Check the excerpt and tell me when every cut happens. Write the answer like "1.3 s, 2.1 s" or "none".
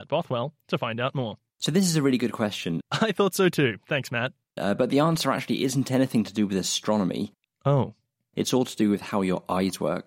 none

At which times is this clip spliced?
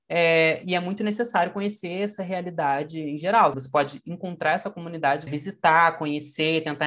3.5 s, 5.3 s

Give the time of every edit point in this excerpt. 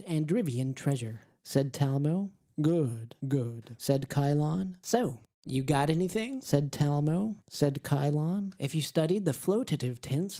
3.2 s, 7.4 s, 8.6 s

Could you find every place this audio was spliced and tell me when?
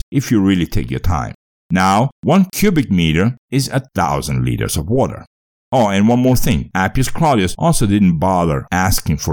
5.5 s

